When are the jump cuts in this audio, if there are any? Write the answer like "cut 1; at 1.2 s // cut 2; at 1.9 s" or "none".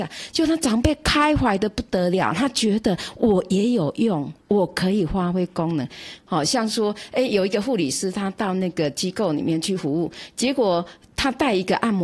cut 1; at 6.2 s